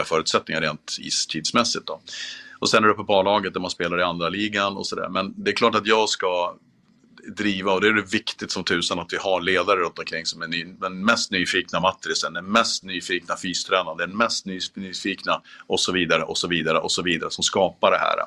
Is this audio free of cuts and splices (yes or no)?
yes